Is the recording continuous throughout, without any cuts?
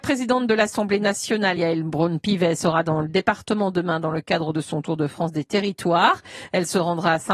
yes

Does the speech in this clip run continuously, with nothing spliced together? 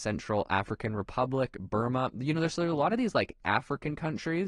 yes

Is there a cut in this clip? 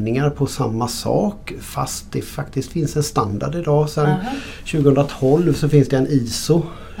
no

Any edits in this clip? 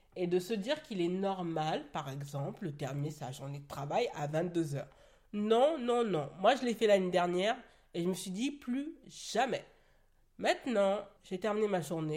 yes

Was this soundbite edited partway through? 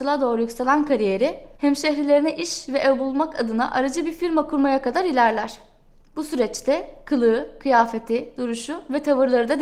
yes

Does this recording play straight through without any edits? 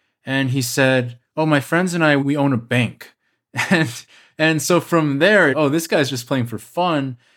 no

